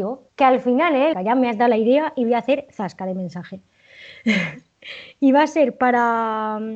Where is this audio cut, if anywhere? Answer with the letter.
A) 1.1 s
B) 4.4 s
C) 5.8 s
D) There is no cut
A